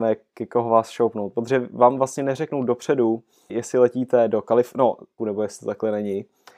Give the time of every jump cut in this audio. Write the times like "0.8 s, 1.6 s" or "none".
3.5 s, 5.2 s